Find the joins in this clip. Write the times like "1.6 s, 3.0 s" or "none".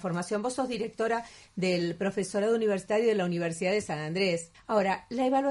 4.5 s

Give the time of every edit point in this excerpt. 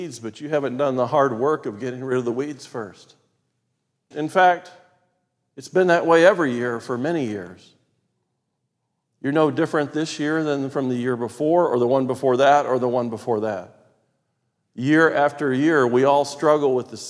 4.1 s

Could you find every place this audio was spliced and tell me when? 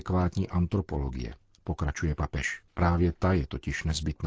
2.7 s

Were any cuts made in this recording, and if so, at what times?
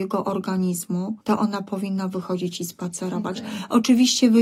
1.2 s

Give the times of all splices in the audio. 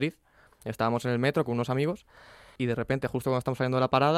2.6 s

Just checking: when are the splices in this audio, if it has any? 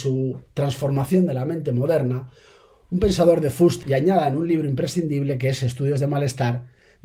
3.8 s

